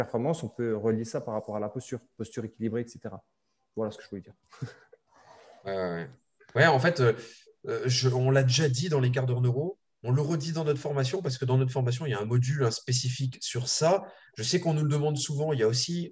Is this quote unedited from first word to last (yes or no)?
yes